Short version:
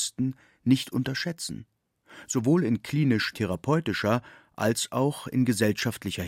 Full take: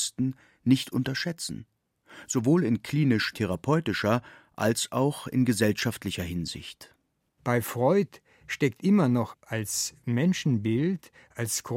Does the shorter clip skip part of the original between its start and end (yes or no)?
no